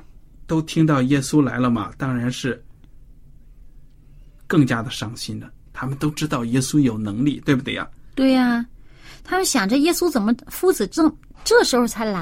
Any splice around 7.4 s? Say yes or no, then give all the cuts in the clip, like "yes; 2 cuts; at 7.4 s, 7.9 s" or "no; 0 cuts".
no; 1 cut; at 5.7 s